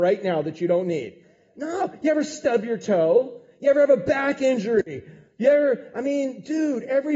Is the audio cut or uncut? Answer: uncut